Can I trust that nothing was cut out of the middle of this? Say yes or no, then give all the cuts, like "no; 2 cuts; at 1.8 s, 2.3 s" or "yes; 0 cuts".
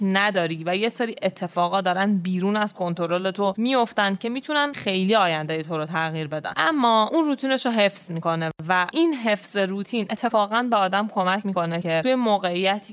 no; 1 cut; at 4.7 s